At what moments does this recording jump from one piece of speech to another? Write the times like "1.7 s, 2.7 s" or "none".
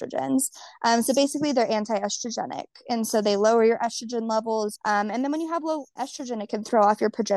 4.8 s, 6.0 s